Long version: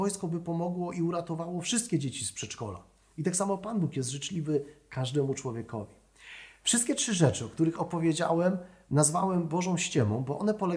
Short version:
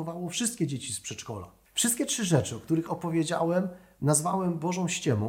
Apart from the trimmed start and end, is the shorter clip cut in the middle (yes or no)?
yes